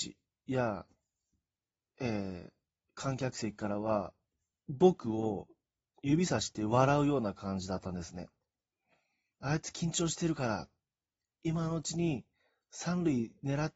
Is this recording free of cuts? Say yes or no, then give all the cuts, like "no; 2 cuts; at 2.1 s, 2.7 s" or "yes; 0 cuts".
no; 1 cut; at 9.3 s